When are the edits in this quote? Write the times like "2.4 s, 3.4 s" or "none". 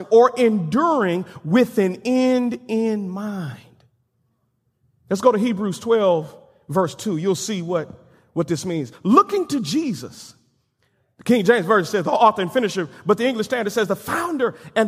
none